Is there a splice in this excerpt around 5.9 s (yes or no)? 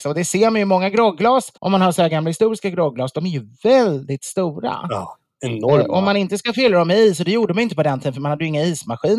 no